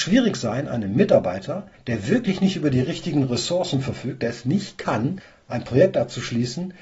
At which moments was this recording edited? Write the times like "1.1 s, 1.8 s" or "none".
none